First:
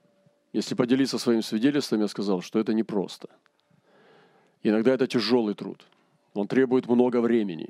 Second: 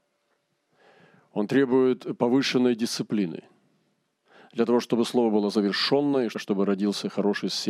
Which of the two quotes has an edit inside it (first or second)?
second